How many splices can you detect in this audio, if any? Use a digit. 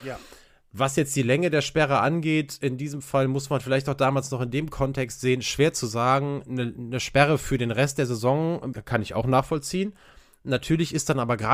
1